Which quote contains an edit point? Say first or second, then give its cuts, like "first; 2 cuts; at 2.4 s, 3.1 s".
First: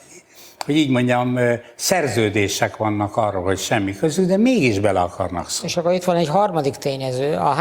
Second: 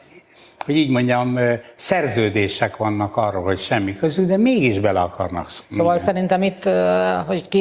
second; 1 cut; at 5.6 s